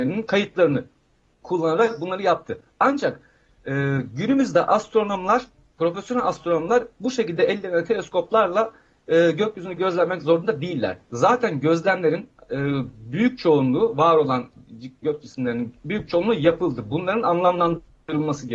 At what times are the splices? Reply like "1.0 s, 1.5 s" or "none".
none